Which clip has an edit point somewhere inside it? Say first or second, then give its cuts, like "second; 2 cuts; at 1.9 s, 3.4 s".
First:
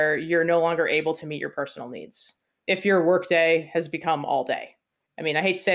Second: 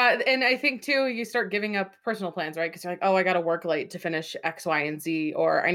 first; 1 cut; at 2.6 s